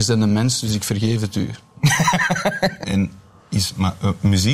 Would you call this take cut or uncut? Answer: cut